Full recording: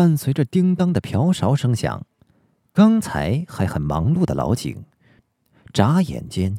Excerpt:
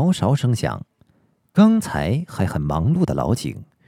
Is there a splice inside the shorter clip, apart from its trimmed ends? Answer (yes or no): no